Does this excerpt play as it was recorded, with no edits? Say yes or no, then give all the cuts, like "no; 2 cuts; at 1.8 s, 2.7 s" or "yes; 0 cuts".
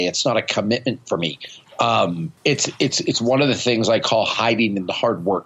no; 1 cut; at 2.4 s